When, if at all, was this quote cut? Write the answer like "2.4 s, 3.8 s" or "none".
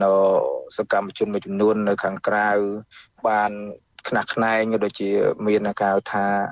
none